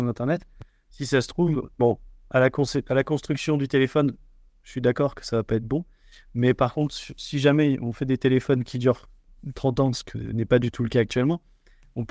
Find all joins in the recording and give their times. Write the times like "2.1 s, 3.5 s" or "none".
1.7 s